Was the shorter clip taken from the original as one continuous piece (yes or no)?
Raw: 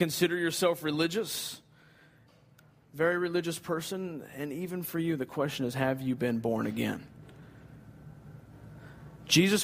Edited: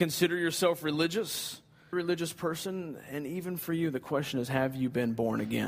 no